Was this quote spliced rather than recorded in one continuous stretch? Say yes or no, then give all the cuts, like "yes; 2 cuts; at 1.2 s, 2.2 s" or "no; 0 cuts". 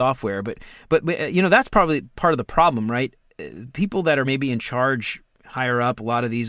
no; 0 cuts